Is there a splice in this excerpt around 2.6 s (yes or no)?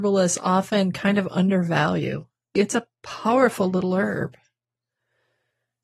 yes